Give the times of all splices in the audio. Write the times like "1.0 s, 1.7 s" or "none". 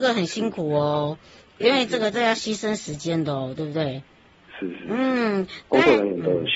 none